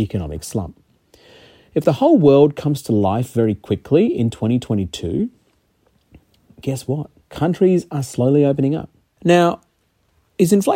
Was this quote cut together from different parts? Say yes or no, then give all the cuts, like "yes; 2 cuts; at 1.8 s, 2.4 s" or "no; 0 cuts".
yes; 2 cuts; at 7.2 s, 9.2 s